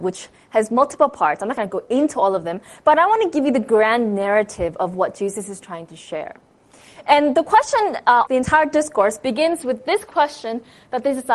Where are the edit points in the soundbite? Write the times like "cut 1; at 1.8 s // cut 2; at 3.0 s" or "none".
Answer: cut 1; at 8.3 s